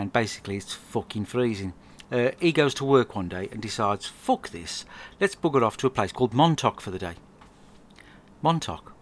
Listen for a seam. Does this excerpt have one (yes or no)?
yes